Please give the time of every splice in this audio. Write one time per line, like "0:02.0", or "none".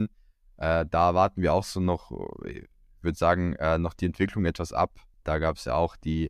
none

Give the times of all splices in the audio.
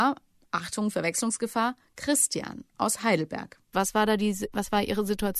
0:03.7

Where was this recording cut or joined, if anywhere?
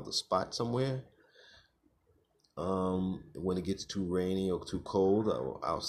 none

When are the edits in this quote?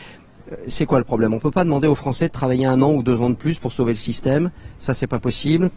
none

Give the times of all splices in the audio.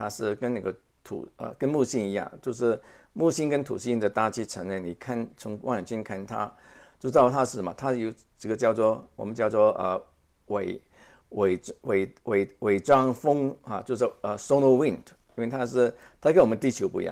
none

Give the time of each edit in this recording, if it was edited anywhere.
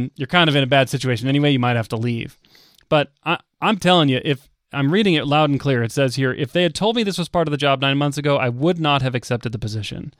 none

